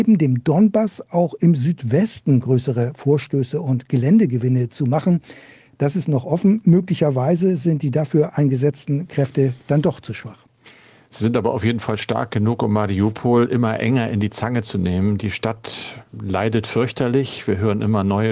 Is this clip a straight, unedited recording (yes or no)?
yes